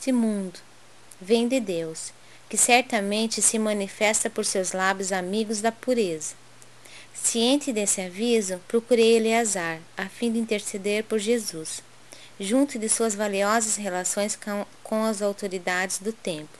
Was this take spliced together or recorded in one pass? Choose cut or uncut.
cut